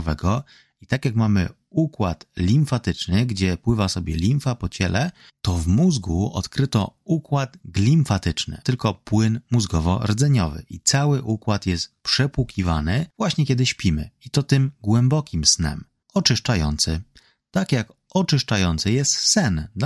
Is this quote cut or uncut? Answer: cut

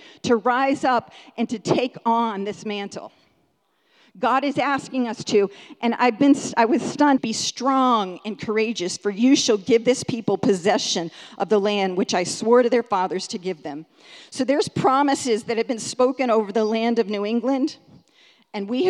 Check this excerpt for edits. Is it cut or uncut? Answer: cut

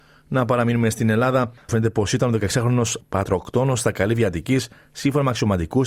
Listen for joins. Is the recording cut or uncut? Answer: cut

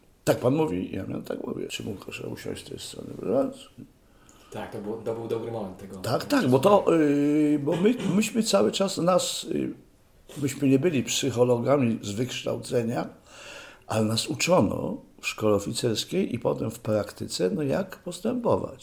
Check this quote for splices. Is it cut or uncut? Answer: cut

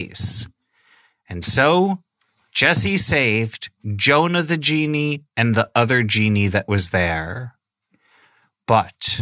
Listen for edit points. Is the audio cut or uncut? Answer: uncut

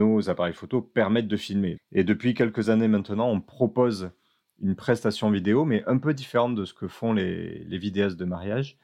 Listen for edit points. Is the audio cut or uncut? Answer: cut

